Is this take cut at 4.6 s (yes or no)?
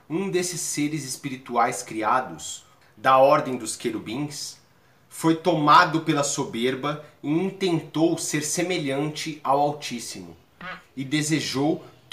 no